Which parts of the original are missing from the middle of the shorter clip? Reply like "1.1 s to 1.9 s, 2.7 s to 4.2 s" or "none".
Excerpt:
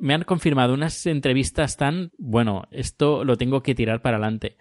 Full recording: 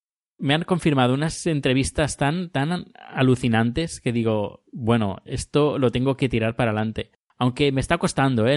2.5 s to 4.6 s

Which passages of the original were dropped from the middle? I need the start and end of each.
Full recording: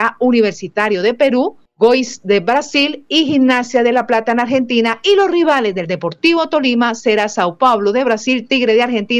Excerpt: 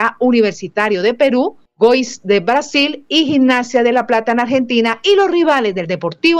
none

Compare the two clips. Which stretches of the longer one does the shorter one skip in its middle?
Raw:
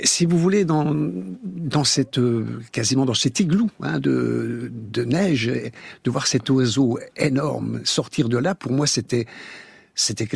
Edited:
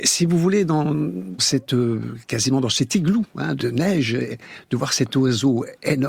1.4 s to 1.8 s, 4.0 s to 4.9 s

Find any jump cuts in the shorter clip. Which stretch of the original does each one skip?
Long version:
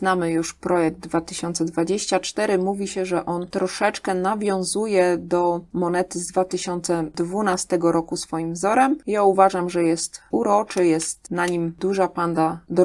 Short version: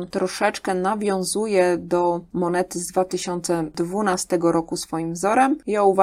none

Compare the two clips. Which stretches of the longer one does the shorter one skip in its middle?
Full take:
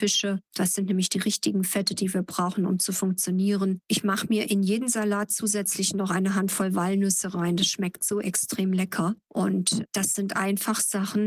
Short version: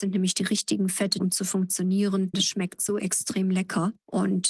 2.0 s to 2.7 s, 3.8 s to 7.6 s

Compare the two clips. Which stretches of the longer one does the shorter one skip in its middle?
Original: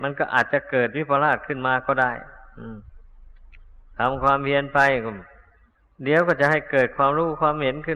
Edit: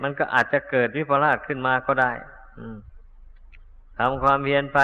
none

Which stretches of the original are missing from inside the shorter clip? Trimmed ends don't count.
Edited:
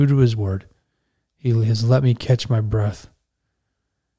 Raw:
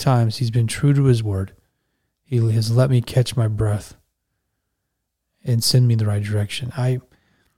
none

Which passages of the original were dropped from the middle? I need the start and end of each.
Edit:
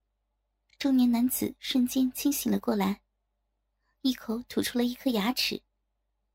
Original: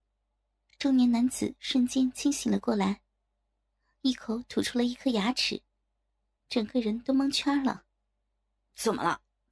none

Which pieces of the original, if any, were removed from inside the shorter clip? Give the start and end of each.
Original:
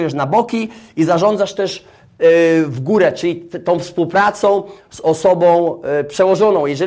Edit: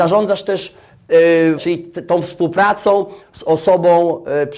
2.7 s to 3.1 s

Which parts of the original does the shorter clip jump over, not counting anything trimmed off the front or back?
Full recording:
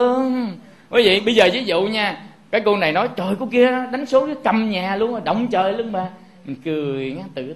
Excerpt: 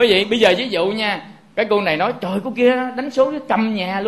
none

